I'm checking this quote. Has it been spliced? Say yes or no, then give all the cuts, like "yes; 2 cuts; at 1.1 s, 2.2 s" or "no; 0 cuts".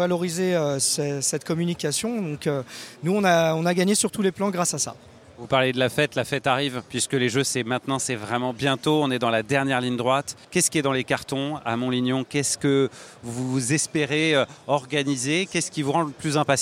yes; 1 cut; at 10.4 s